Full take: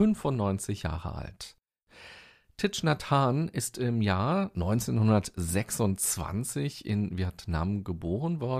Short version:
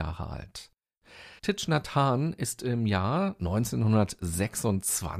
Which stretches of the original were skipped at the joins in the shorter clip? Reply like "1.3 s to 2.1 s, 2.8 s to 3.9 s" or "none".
2.2 s to 2.5 s